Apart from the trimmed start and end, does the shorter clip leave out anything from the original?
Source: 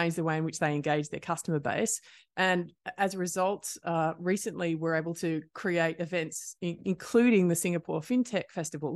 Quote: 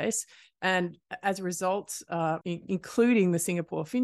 yes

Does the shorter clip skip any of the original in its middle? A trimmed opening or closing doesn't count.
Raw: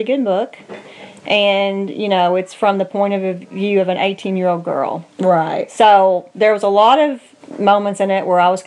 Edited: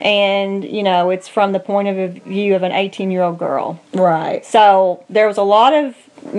no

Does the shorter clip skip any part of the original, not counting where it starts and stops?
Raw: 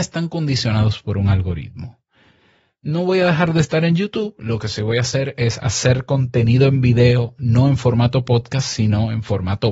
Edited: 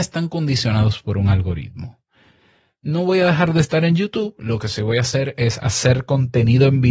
no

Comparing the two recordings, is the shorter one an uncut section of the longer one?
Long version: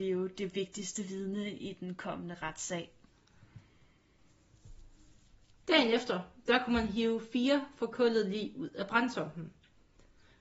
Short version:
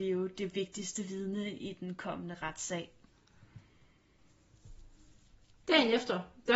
yes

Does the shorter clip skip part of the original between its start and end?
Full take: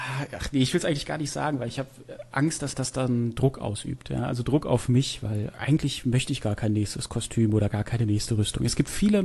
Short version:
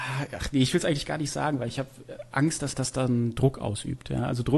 no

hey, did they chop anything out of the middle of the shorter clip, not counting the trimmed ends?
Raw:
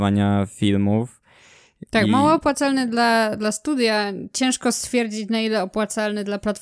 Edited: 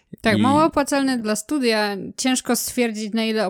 yes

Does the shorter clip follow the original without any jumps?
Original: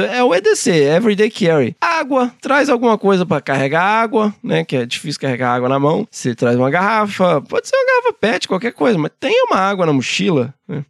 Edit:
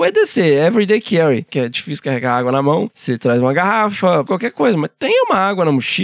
no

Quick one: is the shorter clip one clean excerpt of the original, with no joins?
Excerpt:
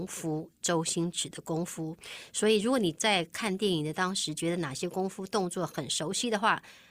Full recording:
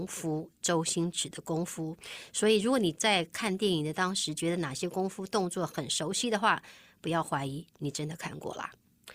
yes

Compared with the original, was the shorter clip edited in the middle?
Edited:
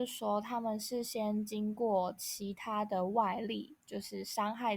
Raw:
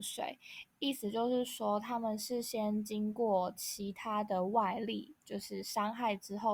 no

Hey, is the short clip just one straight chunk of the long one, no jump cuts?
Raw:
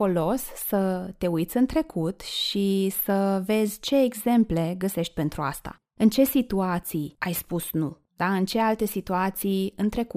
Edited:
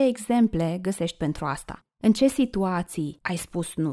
yes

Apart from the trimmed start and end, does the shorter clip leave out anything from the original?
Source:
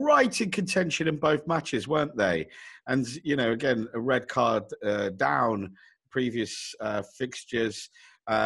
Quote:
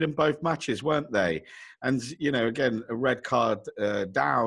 no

